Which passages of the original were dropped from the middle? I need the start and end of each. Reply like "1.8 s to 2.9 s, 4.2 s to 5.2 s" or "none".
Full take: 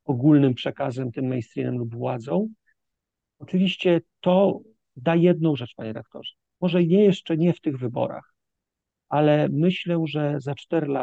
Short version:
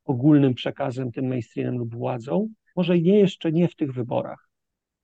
2.7 s to 6.6 s